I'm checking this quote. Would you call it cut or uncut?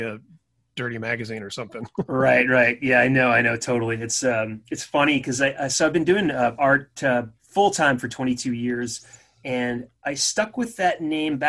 uncut